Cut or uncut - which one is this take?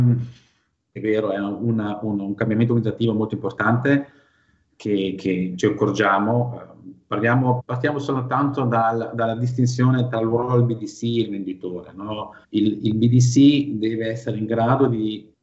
cut